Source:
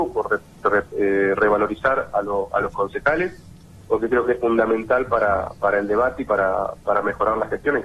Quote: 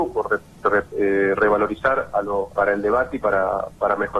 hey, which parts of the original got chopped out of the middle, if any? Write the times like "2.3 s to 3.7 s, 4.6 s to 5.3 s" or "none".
2.5 s to 5.6 s